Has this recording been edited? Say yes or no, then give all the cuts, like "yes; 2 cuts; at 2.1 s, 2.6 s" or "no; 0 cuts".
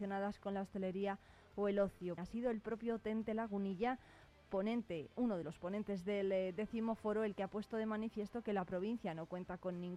yes; 1 cut; at 2.2 s